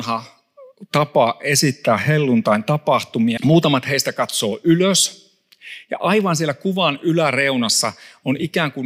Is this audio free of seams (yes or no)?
no